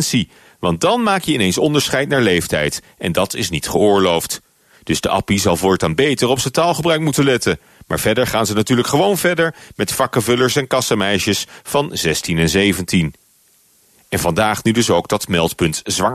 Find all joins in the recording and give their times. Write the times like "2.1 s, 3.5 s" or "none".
none